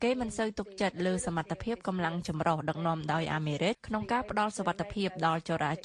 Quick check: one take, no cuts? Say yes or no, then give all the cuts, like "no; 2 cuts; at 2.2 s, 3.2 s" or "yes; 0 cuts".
no; 1 cut; at 3.7 s